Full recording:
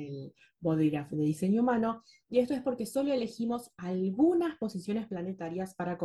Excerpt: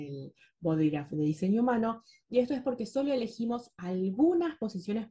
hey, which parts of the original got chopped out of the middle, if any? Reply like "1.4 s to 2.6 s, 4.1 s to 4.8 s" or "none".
none